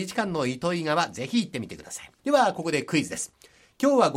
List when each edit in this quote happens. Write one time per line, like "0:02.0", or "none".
0:02.2